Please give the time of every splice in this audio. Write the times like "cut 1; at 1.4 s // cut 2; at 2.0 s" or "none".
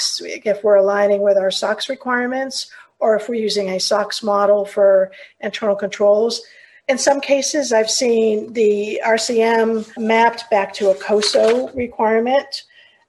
cut 1; at 10.0 s